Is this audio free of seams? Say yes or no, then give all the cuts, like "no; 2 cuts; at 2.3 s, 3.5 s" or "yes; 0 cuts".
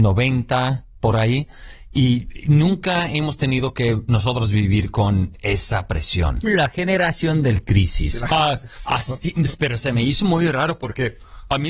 no; 2 cuts; at 6.4 s, 8.8 s